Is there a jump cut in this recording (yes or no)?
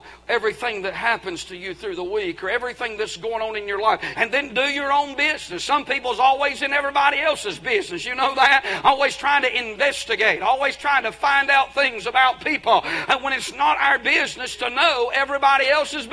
yes